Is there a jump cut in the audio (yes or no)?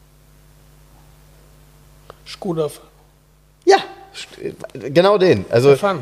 no